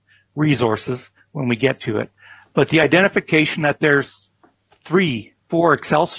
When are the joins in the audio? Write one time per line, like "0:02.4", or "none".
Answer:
none